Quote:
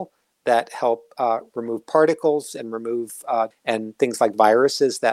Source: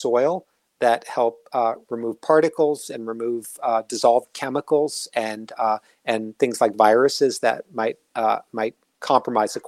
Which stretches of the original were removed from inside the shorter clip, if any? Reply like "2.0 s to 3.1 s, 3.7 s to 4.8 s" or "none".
3.9 s to 5.9 s